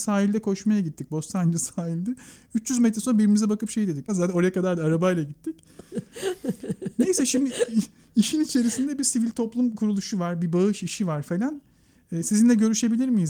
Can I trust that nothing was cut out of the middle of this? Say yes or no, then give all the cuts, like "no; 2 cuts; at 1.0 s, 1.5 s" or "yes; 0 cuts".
no; 1 cut; at 4.1 s